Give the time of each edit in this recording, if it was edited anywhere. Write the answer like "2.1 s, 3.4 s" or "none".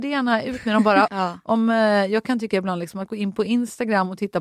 1.1 s